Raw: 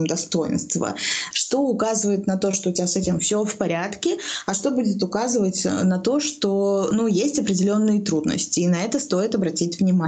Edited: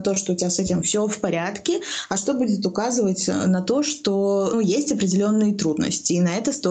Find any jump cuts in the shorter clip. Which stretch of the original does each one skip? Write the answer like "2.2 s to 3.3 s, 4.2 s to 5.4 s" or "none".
6.9 s to 7.0 s